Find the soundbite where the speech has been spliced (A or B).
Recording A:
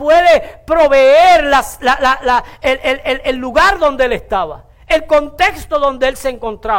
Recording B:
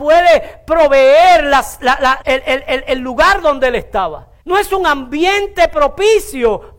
B